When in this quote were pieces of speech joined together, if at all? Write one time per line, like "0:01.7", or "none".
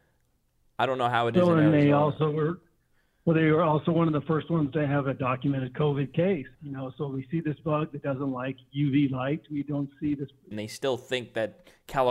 0:06.5
0:10.5